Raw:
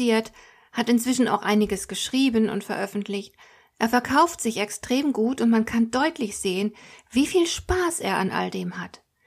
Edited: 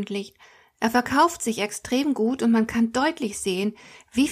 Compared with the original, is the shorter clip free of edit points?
yes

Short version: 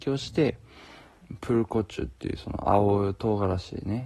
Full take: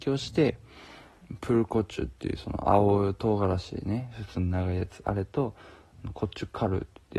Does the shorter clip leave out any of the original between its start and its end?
no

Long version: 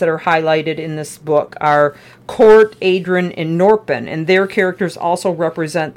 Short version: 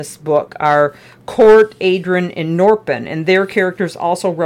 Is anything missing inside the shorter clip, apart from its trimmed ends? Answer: no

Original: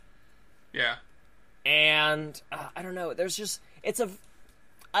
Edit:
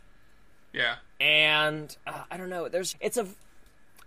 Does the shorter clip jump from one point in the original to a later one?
yes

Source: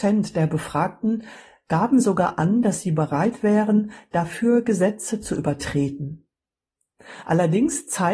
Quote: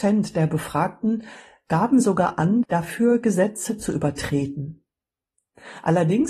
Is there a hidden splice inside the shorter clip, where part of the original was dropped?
yes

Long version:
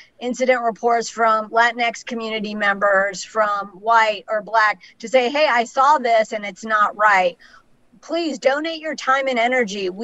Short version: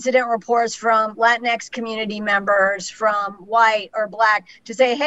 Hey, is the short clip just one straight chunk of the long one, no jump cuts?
yes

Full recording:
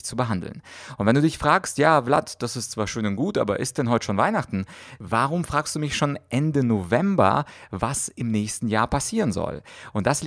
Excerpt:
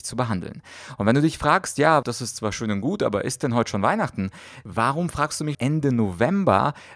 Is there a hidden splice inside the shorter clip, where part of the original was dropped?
yes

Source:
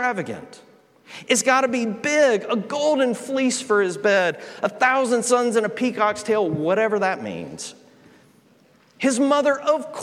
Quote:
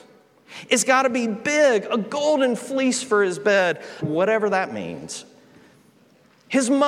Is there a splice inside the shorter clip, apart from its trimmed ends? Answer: yes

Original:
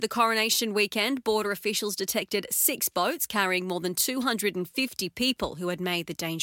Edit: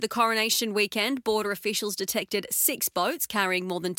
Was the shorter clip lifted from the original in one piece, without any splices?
yes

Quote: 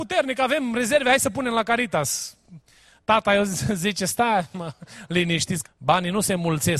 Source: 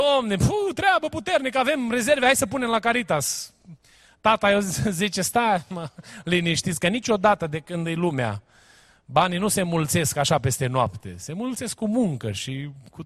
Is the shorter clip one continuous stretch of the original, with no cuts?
no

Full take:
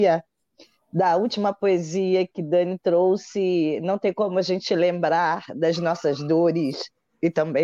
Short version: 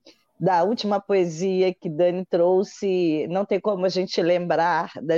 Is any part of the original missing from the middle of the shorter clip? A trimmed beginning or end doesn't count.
no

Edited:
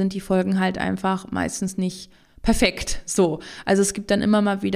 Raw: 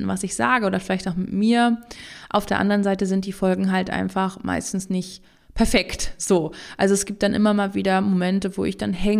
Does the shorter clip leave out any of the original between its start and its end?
no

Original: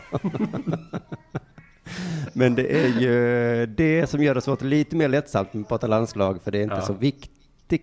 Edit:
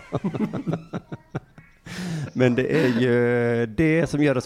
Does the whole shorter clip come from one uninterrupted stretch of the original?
yes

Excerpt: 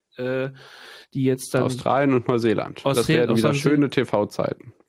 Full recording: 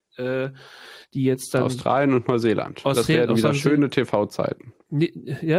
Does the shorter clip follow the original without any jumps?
yes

